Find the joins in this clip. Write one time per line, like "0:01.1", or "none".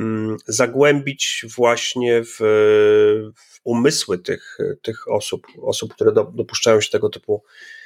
none